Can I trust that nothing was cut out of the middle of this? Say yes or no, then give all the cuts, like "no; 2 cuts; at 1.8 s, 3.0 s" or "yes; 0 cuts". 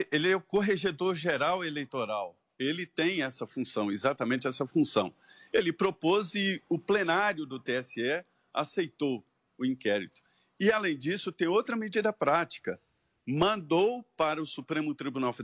yes; 0 cuts